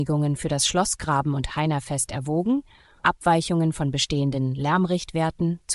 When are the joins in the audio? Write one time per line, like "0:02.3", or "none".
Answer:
0:03.0